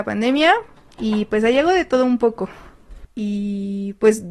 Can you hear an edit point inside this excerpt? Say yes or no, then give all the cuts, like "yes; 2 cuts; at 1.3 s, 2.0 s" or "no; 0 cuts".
yes; 1 cut; at 3.0 s